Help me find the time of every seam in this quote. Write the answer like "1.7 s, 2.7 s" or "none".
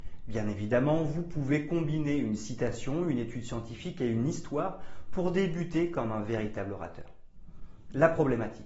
none